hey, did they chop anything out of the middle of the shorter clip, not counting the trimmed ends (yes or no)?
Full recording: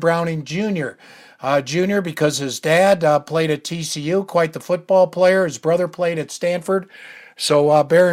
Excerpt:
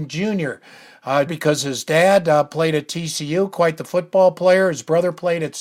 yes